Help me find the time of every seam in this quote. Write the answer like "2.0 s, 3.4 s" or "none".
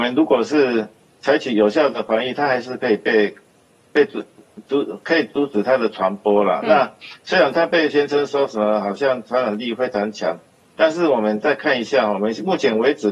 none